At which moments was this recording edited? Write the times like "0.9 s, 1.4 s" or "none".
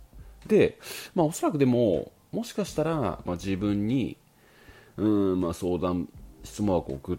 3.3 s